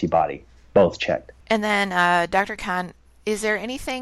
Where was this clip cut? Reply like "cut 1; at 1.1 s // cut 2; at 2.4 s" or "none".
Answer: cut 1; at 1.4 s